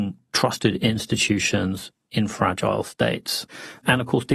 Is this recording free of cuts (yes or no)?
yes